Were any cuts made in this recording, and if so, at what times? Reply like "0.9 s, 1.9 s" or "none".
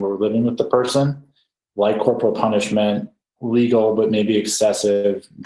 3.2 s